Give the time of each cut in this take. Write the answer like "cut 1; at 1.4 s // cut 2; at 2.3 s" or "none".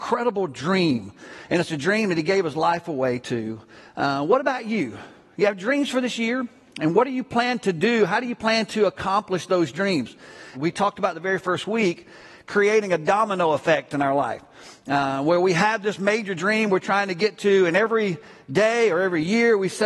cut 1; at 10.5 s